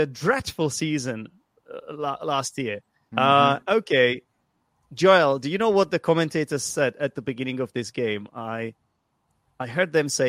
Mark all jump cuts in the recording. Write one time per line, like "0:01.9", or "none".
0:03.1